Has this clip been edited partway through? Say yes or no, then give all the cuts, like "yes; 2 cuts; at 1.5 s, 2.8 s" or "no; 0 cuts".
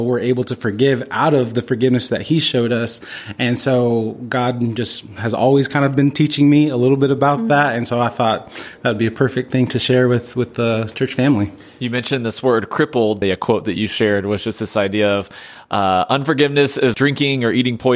yes; 2 cuts; at 13.2 s, 16.9 s